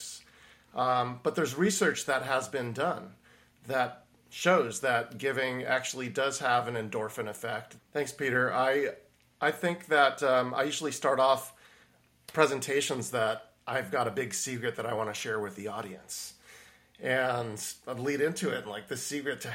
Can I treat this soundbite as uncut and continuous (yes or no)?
no